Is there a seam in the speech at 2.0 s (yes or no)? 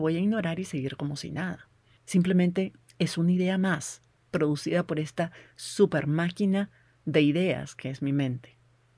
yes